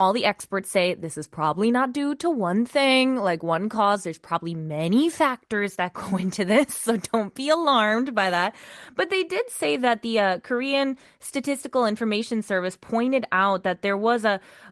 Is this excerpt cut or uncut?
uncut